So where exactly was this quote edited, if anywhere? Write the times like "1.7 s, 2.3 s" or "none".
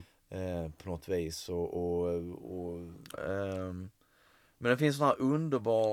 3.1 s